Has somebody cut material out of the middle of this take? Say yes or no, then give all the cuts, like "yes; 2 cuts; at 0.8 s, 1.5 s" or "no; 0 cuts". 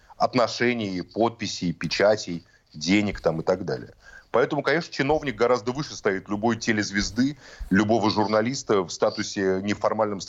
no; 0 cuts